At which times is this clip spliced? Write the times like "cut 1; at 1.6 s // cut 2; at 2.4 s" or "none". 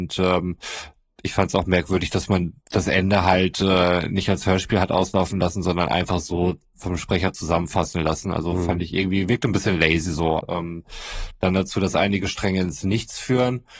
cut 1; at 2.6 s // cut 2; at 10.4 s